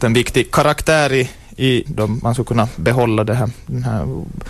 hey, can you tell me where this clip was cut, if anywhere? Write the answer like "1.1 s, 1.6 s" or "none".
1.9 s